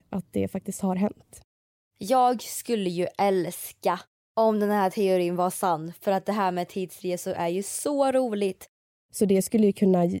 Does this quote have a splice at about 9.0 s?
yes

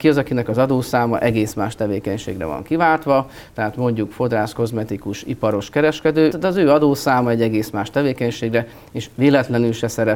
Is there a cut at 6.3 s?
yes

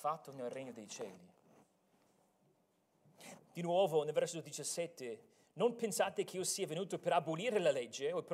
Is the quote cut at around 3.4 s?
yes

